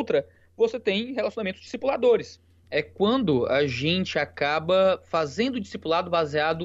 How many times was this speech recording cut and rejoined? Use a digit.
1